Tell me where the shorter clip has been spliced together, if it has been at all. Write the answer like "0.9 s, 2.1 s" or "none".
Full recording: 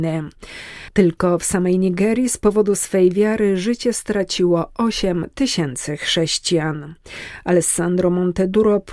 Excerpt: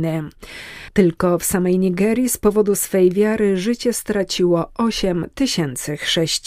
none